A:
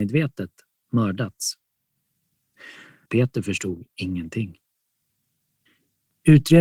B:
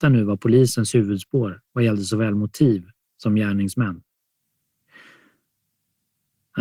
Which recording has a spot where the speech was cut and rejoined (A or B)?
A